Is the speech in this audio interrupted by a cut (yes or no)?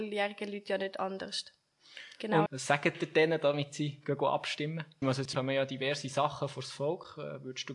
yes